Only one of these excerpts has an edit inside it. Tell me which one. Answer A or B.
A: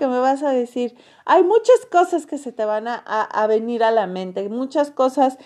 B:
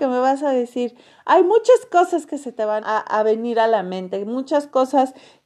B